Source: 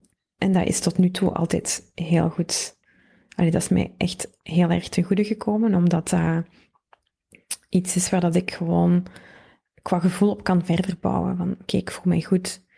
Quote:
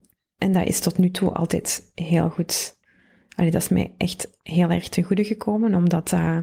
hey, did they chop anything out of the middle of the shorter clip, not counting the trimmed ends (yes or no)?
no